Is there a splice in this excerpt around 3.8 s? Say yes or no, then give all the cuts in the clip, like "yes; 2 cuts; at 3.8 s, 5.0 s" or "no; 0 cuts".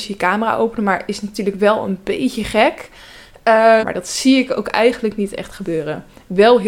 yes; 1 cut; at 3.8 s